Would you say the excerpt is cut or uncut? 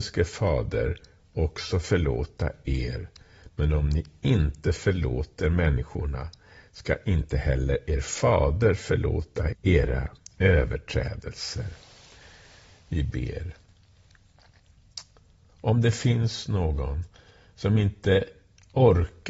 cut